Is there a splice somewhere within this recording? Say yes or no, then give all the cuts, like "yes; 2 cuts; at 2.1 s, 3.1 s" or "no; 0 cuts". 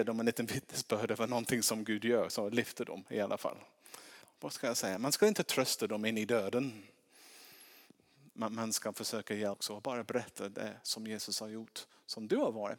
yes; 1 cut; at 4.2 s